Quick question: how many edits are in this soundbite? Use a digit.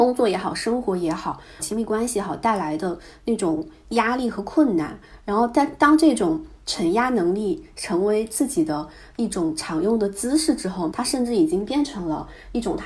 2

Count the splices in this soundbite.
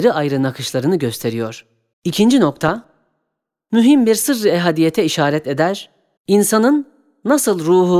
2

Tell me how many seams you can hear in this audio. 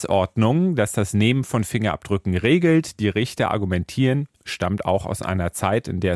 1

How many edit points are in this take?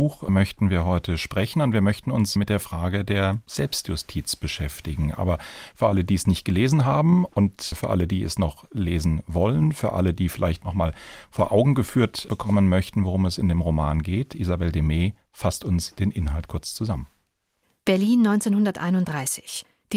0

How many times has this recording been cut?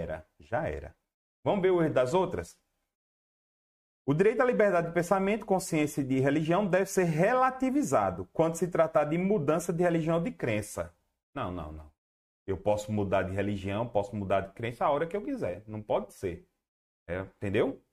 0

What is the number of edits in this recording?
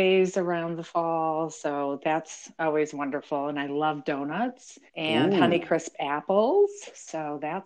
1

